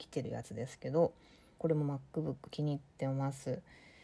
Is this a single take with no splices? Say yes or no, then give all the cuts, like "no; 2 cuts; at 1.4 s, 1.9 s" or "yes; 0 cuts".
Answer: no; 1 cut; at 1.6 s